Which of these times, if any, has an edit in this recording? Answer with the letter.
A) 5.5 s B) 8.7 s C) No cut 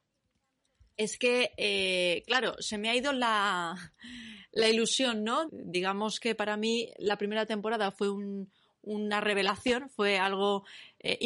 A